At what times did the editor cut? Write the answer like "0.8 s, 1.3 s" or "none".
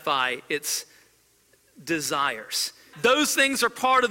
2.9 s